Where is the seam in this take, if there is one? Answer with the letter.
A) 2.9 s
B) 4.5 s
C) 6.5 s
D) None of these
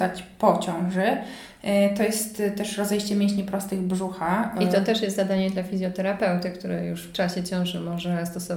D